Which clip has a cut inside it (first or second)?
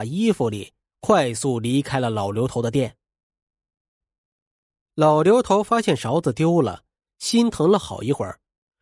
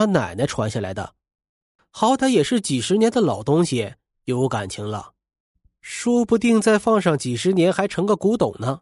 second